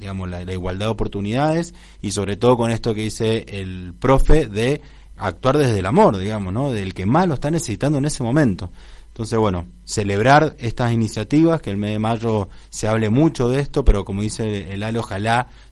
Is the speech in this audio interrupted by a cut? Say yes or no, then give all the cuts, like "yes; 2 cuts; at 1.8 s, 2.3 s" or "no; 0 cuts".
yes; 1 cut; at 5.1 s